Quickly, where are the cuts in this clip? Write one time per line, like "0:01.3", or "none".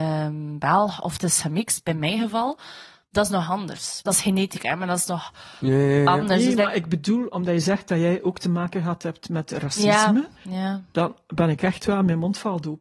0:04.1